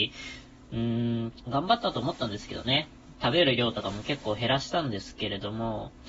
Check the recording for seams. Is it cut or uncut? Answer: cut